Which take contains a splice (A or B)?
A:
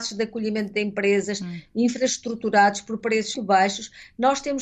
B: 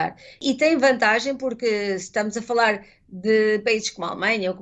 A